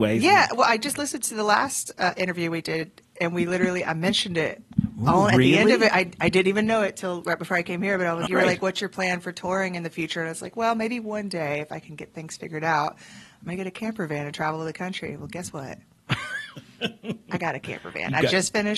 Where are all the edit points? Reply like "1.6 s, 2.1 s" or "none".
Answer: 8.3 s